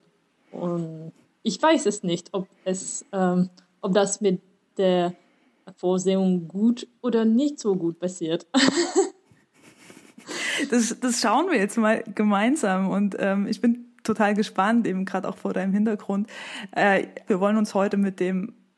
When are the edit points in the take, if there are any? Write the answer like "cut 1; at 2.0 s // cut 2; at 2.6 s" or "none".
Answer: cut 1; at 17.3 s